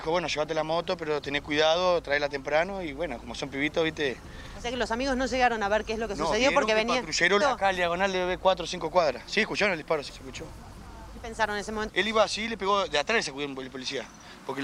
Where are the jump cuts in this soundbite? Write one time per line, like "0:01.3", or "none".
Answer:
0:07.4
0:10.1
0:11.9